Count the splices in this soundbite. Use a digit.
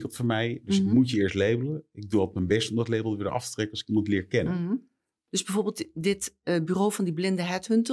1